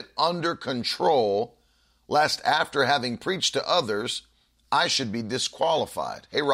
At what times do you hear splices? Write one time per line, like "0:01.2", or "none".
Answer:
none